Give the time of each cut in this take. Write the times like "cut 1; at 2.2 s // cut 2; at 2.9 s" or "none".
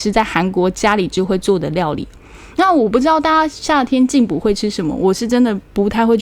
none